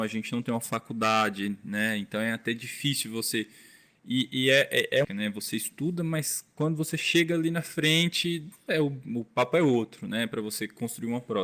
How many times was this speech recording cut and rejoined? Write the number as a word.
one